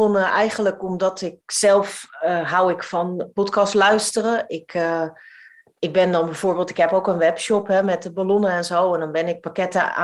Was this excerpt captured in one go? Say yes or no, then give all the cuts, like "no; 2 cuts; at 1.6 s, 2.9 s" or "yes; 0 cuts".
yes; 0 cuts